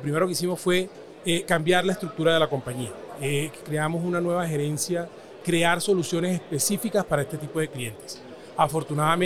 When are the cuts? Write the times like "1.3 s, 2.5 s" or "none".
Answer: 3.6 s, 5.4 s